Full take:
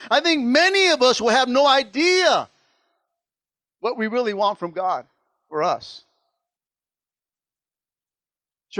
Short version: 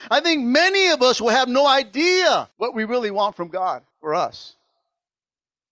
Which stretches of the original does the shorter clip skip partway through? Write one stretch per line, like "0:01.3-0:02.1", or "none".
0:02.5-0:03.7
0:05.1-0:05.4